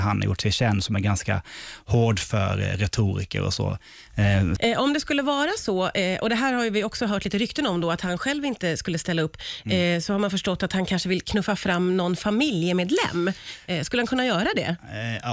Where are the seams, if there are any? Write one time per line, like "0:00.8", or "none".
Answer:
0:04.6